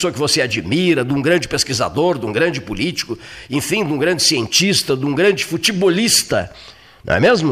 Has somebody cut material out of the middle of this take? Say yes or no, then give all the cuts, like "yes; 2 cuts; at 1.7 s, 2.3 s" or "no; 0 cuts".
no; 0 cuts